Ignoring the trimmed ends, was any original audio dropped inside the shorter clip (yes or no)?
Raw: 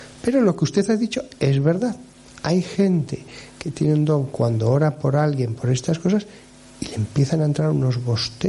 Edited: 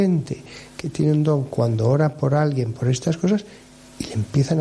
no